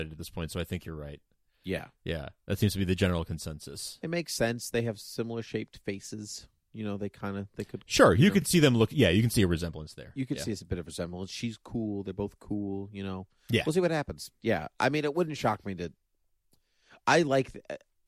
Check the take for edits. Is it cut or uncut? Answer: uncut